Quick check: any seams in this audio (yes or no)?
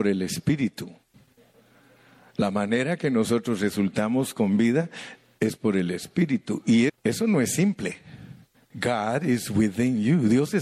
yes